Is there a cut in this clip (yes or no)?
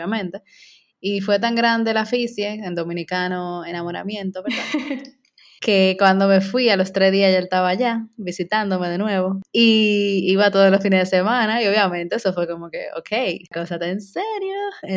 no